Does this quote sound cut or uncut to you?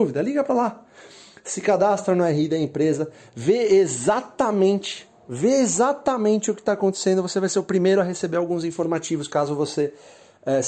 uncut